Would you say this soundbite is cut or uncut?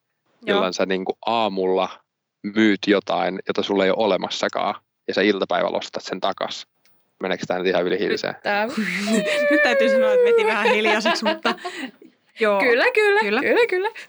uncut